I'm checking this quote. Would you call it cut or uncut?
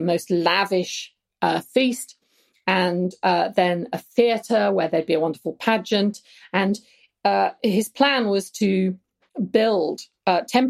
uncut